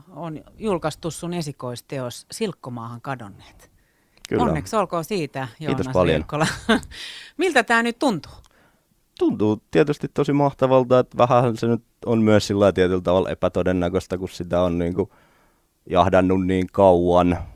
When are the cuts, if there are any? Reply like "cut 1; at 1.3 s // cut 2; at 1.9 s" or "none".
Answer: none